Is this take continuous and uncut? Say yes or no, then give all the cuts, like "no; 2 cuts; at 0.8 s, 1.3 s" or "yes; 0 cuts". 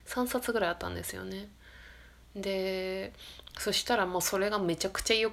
yes; 0 cuts